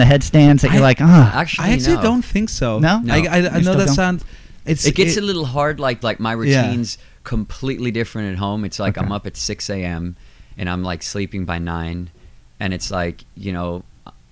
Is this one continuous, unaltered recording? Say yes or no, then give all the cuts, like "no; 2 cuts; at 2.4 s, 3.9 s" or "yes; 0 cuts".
no; 1 cut; at 6.0 s